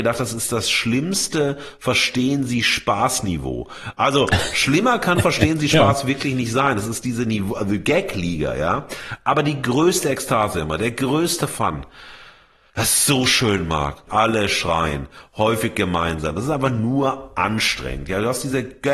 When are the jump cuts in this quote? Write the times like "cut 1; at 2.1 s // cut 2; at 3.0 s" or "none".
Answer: cut 1; at 14.1 s